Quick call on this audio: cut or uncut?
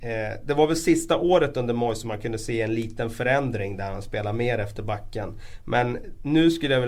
uncut